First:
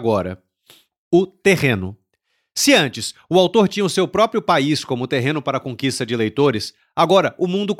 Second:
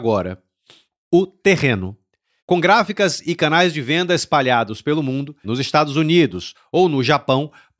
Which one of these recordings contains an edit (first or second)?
second